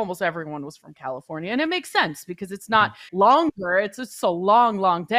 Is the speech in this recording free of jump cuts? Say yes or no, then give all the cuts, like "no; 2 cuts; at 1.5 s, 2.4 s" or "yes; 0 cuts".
no; 1 cut; at 3.1 s